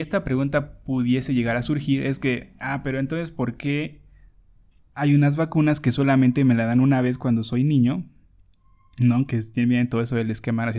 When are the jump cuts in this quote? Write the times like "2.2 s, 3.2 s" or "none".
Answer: none